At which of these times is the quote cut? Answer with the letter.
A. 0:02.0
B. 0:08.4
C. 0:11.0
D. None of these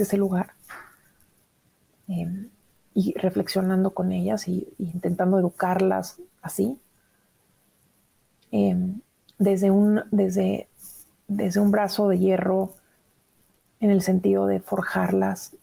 D